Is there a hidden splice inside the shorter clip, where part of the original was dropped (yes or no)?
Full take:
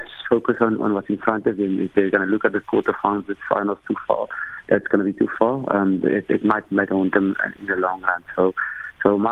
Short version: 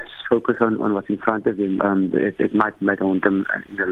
yes